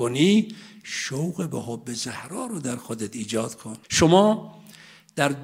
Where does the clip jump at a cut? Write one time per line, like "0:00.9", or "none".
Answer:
0:03.8